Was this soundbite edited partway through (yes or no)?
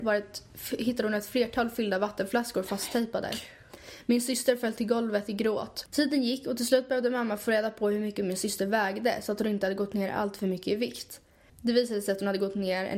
yes